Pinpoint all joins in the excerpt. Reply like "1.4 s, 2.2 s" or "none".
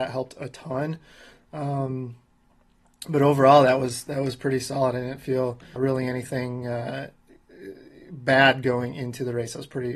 5.8 s